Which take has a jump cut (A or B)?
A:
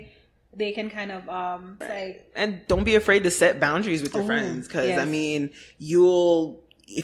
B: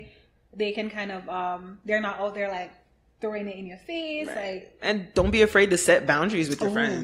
A